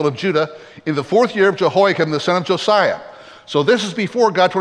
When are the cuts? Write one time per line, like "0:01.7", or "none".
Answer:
none